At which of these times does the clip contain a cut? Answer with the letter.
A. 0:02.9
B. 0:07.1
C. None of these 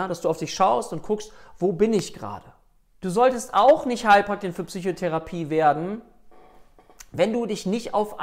A